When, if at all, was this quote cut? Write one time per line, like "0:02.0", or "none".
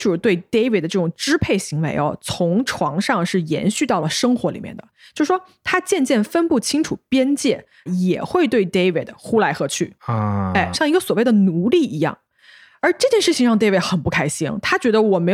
0:07.9
0:10.7